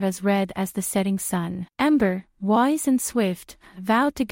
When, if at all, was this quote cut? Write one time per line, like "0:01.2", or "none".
0:01.7